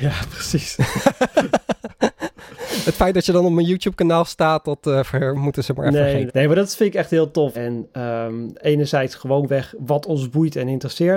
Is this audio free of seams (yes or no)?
no